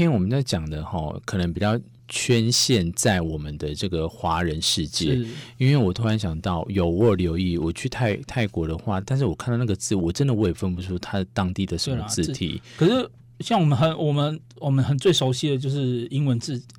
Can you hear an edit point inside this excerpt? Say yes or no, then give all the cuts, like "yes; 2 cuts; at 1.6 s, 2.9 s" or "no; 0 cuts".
no; 0 cuts